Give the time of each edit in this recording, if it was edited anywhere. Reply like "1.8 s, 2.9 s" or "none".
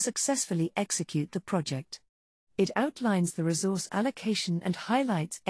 none